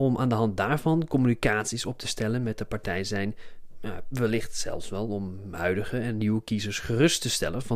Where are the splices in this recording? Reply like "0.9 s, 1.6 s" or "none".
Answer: 4.1 s